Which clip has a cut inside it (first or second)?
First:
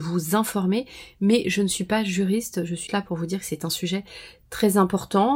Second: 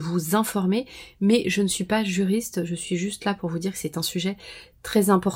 first